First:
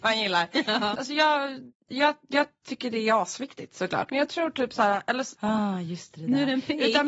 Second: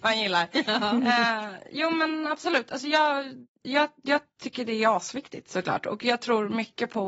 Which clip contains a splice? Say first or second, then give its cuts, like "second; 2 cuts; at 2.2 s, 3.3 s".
first; 3 cuts; at 0.9 s, 4.1 s, 5.3 s